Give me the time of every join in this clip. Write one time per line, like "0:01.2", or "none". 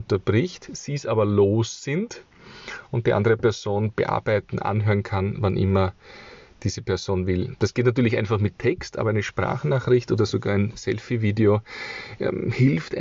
none